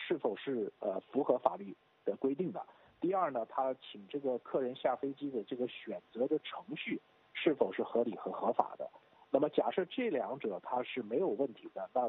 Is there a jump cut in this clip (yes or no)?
no